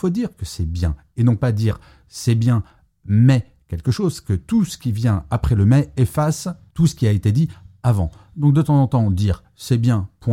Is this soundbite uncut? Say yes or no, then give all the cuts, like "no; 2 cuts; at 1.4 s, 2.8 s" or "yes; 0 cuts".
yes; 0 cuts